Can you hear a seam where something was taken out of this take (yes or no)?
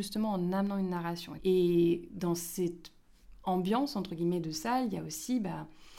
yes